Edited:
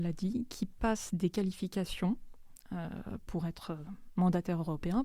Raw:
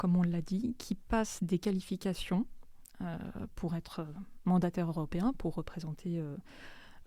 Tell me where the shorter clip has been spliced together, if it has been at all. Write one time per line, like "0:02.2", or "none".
none